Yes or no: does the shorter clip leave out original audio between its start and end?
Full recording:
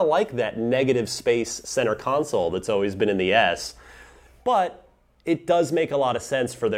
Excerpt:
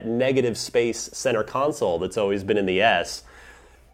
no